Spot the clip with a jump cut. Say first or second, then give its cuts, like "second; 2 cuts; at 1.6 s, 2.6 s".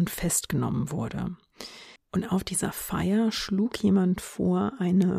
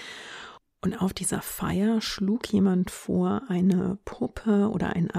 first; 1 cut; at 2.0 s